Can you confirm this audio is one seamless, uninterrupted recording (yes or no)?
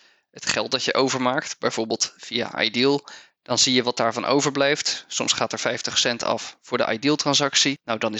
yes